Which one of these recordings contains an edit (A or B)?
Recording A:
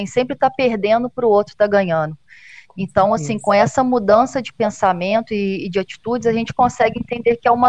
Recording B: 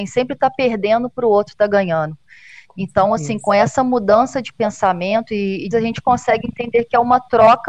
B